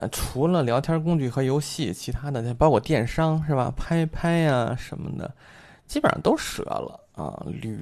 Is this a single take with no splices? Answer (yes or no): yes